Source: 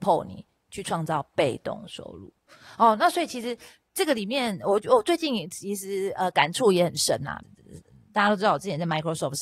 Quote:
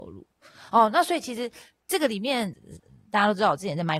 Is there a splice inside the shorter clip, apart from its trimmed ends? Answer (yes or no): yes